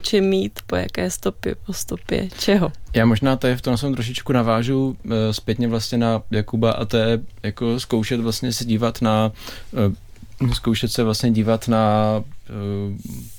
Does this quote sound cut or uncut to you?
uncut